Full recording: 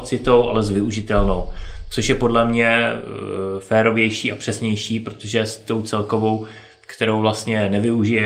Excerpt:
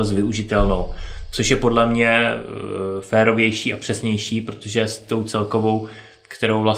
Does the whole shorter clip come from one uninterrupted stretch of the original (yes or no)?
yes